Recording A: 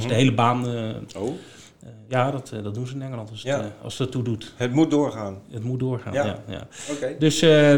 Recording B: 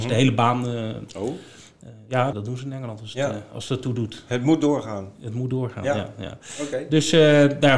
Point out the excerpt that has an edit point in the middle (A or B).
B